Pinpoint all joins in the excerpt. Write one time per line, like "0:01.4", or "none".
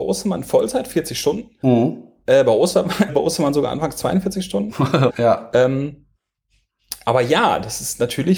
0:03.1
0:05.1